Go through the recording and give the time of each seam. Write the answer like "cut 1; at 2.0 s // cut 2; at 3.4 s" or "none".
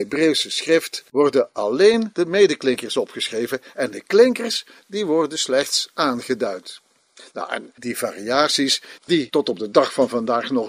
cut 1; at 7.8 s // cut 2; at 9.0 s